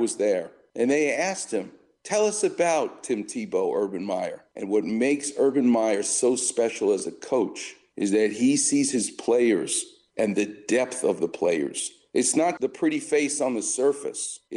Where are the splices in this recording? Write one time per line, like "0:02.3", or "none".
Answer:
0:04.5
0:12.6